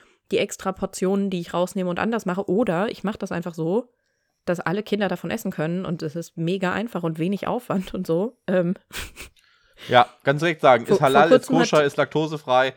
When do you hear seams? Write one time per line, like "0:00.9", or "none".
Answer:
none